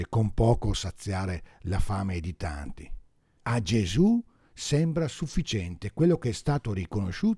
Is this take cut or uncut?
cut